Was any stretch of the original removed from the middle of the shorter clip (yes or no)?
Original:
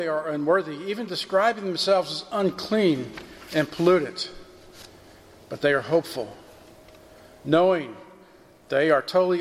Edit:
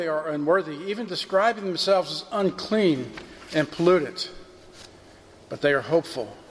no